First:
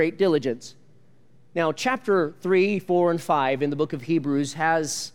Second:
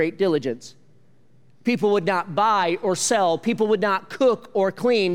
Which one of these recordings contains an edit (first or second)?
first